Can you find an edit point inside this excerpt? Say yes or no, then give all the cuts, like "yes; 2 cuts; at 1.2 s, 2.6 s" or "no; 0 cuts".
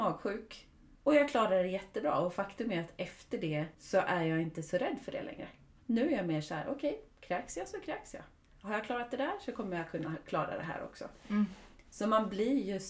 yes; 2 cuts; at 0.9 s, 3.7 s